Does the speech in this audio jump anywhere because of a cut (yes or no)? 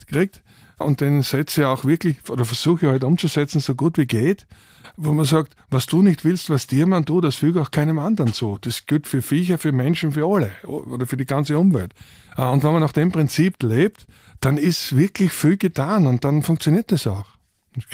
no